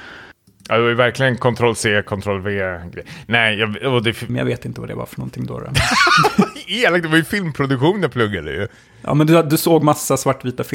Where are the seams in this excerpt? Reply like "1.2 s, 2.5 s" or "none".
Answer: 4.3 s